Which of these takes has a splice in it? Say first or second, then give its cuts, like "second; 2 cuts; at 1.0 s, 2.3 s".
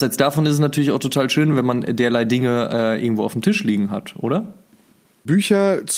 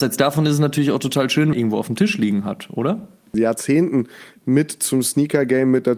second; 2 cuts; at 1.5 s, 3.3 s